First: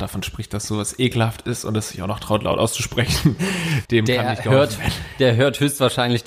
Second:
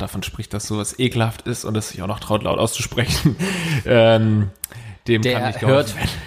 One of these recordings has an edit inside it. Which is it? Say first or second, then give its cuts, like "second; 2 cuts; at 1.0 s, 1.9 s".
first; 1 cut; at 3.9 s